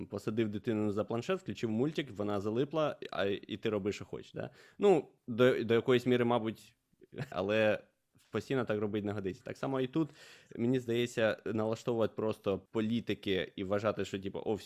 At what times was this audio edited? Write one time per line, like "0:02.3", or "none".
0:07.3